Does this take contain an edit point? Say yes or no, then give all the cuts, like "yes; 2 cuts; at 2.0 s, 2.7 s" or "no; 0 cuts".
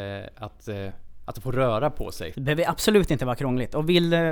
yes; 2 cuts; at 1.2 s, 2.3 s